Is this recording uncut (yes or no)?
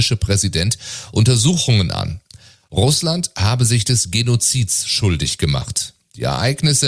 yes